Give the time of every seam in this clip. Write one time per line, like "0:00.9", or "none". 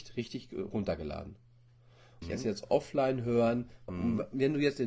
0:02.2
0:03.9